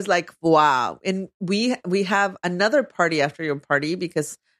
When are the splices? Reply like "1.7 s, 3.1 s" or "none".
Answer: none